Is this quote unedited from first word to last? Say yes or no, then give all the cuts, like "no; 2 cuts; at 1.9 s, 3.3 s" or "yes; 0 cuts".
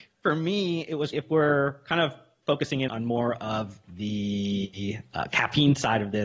no; 2 cuts; at 1.1 s, 2.9 s